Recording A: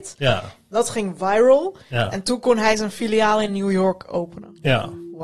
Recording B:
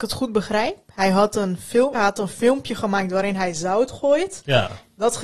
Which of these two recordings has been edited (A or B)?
B